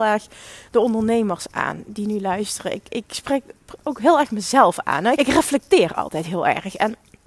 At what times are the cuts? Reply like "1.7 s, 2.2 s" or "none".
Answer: 5.2 s